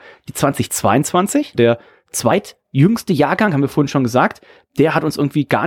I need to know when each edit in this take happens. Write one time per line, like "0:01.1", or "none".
0:01.5